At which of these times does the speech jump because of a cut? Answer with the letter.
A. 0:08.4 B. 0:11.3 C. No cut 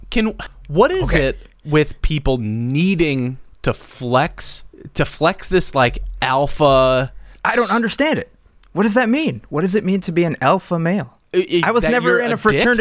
C